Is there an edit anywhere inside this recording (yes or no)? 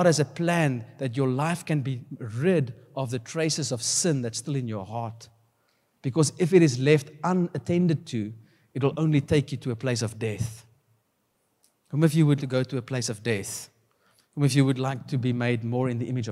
yes